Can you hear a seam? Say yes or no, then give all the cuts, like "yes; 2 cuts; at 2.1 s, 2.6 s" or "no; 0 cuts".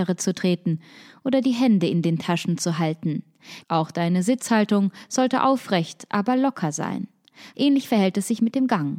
yes; 2 cuts; at 3.6 s, 7.5 s